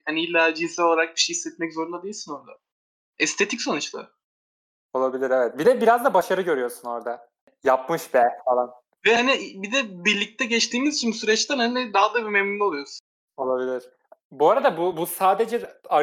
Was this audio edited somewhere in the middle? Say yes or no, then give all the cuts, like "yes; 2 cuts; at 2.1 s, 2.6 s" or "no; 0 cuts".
no; 0 cuts